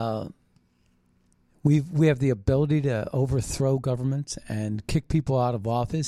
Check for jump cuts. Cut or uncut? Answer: uncut